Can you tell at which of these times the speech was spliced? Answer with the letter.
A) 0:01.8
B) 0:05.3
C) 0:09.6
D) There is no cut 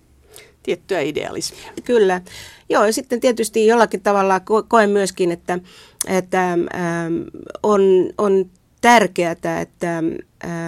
A